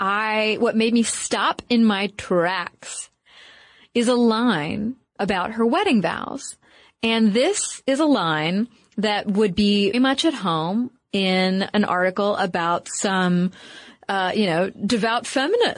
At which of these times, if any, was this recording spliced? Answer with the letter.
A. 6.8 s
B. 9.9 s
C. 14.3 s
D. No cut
B